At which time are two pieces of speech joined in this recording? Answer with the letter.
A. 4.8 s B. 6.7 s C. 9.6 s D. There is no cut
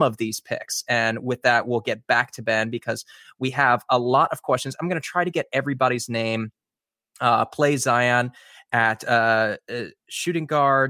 D